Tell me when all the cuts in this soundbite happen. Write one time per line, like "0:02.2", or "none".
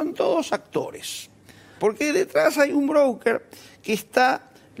0:01.8